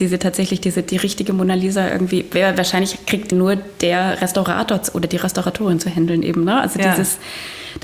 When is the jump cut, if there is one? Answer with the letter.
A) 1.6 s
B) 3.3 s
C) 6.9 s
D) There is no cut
B